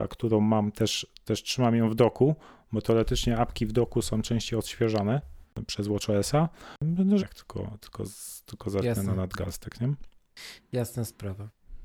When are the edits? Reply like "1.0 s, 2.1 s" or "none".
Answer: 7.2 s